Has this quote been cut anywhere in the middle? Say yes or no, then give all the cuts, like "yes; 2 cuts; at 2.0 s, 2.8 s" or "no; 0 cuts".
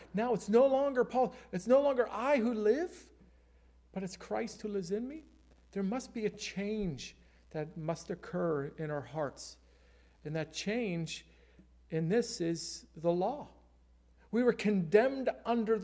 no; 0 cuts